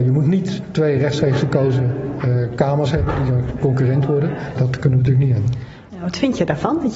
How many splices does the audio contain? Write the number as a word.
two